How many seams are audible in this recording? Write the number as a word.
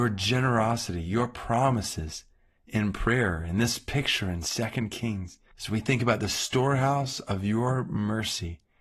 one